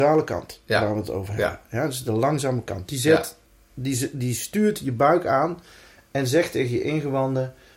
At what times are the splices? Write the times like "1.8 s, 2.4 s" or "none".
none